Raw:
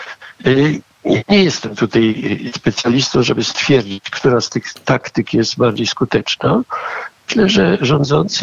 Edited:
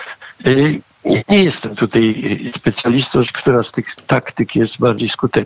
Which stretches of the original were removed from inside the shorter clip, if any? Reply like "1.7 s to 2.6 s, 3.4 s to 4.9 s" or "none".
3.2 s to 4.0 s